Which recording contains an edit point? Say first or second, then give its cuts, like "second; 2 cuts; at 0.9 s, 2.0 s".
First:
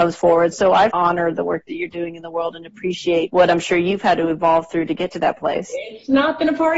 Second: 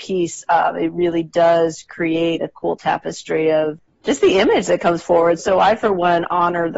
first; 1 cut; at 0.9 s